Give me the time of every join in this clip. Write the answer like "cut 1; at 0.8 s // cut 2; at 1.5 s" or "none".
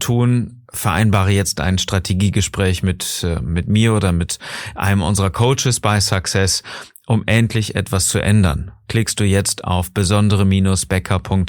none